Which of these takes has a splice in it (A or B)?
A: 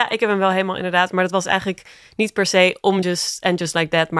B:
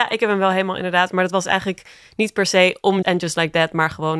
B